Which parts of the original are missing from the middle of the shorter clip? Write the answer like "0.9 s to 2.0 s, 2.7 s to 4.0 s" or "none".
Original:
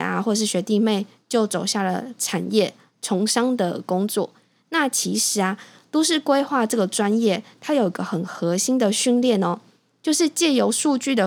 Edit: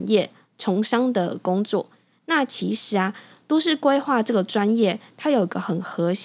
none